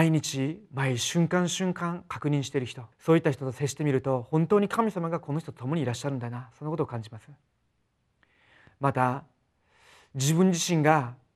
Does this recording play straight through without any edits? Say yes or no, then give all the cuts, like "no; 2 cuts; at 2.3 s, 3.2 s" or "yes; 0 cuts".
no; 1 cut; at 2.9 s